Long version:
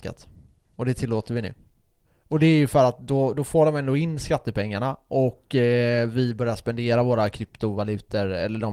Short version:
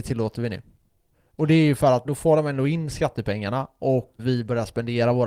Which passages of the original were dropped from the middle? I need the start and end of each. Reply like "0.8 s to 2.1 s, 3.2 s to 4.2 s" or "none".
3.0 s to 3.3 s, 5.5 s to 6.1 s